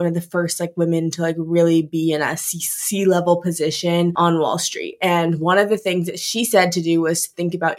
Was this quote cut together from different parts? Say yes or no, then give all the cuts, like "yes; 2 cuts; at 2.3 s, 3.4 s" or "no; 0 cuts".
no; 0 cuts